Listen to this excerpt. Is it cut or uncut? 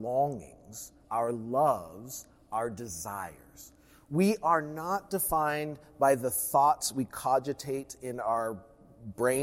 uncut